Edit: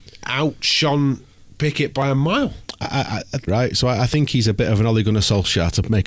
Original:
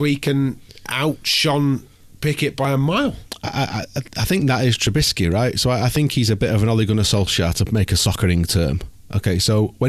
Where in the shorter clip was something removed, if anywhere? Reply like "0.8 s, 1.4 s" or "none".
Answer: 3.5 s

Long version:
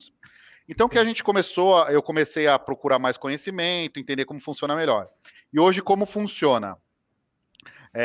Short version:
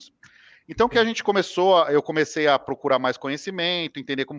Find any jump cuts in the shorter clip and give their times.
none

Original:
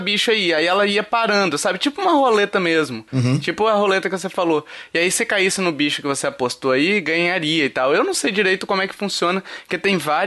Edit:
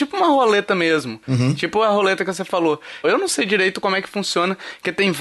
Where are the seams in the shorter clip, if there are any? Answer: 3.0 s

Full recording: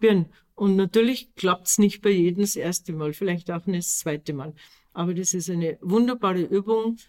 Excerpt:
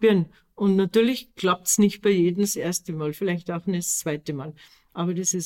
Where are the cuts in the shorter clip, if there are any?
none

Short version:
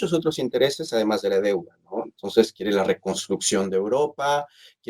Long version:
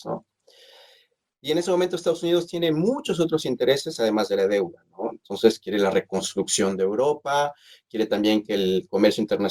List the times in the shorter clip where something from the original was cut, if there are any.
none

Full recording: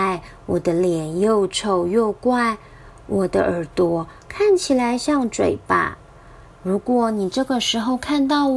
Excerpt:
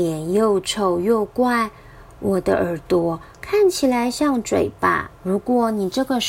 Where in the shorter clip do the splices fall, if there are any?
5.2 s

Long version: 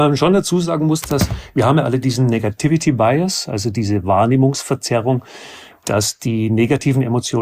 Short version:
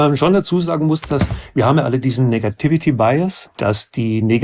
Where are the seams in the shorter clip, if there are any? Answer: 3.5 s

